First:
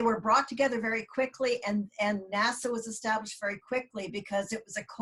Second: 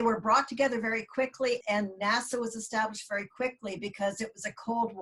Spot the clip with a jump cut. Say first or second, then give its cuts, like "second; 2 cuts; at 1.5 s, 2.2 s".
second; 1 cut; at 1.6 s